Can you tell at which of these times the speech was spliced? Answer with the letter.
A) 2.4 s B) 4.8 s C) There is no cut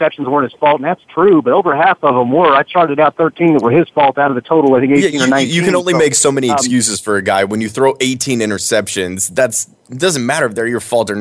C